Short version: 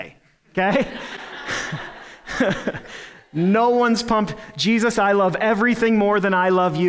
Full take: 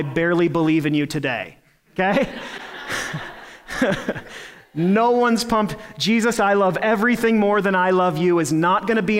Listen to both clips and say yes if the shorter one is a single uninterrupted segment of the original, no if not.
yes